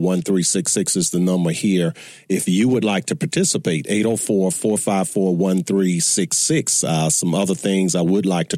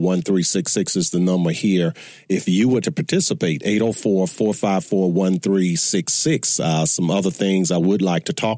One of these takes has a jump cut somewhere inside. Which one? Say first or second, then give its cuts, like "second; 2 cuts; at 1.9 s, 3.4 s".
second; 1 cut; at 2.8 s